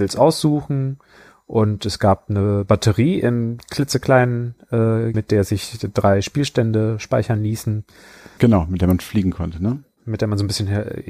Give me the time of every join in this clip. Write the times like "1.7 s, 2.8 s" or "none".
5.1 s, 8.4 s